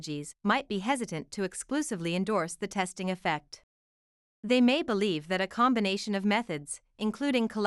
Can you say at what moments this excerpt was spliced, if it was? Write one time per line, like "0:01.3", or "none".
none